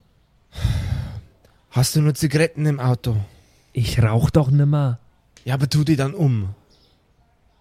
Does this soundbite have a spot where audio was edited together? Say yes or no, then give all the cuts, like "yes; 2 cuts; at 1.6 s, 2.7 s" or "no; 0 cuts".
no; 0 cuts